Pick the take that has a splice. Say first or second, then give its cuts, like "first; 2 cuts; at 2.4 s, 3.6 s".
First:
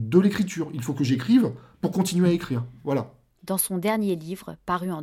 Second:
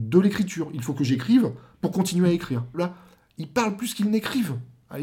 second; 1 cut; at 2.7 s